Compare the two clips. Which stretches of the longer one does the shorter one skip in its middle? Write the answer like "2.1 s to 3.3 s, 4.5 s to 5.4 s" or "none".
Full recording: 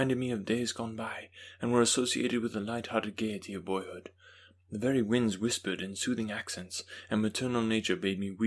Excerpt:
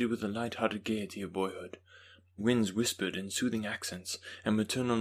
4.7 s to 5.0 s